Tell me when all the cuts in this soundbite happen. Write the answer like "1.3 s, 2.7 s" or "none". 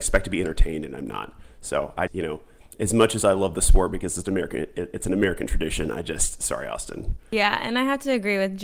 2.1 s